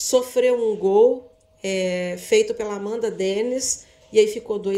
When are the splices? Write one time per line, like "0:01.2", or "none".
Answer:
none